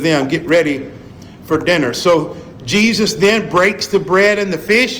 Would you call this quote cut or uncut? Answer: uncut